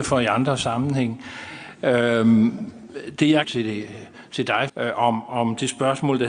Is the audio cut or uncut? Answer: cut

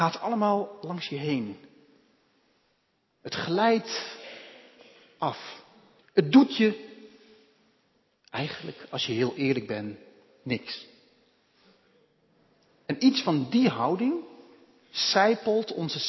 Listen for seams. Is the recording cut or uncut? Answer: cut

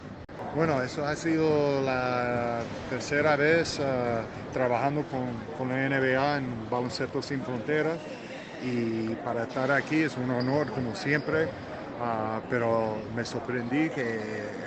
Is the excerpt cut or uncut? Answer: uncut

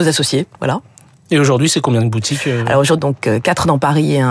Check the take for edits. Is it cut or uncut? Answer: cut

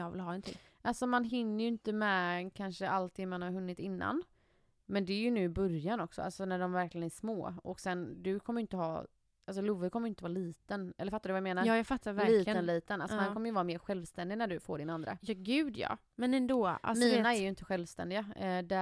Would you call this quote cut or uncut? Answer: uncut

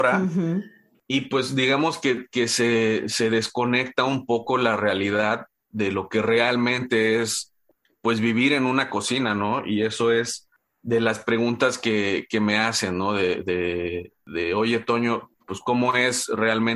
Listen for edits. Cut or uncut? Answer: uncut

